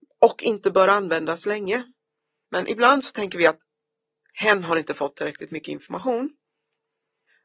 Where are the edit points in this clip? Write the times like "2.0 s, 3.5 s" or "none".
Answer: 2.5 s